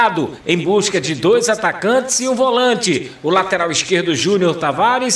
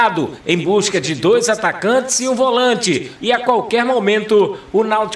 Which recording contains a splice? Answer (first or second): second